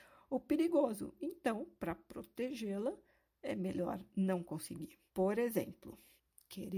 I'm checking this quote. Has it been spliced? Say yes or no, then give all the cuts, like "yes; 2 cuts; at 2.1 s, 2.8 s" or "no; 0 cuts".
yes; 1 cut; at 5.1 s